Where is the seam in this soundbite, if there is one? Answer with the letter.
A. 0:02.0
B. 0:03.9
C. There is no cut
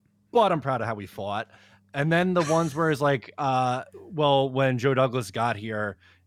C